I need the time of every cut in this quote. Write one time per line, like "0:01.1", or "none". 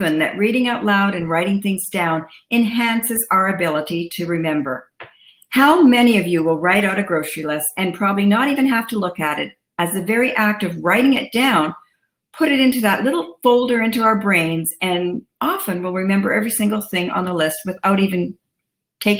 none